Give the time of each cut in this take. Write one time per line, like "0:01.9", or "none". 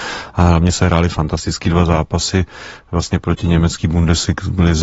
none